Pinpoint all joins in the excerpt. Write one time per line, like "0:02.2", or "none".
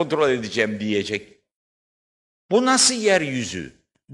none